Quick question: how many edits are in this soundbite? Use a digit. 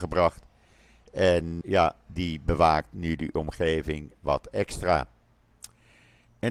1